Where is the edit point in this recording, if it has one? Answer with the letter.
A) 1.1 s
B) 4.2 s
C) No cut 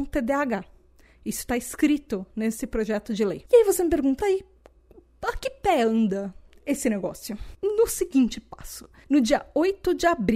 B